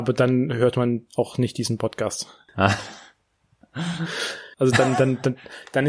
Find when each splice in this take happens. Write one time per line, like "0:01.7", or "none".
0:02.5
0:04.5